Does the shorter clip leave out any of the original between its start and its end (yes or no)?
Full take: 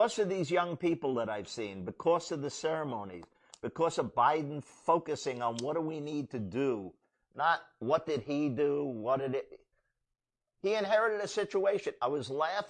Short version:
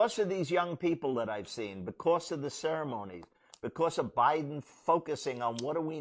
no